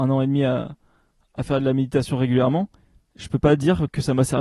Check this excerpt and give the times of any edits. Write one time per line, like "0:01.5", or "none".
none